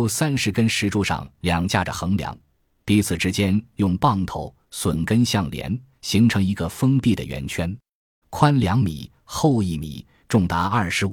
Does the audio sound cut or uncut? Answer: cut